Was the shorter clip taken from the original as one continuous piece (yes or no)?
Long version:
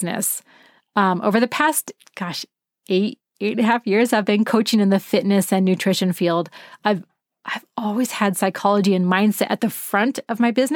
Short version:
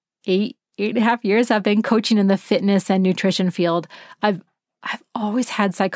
yes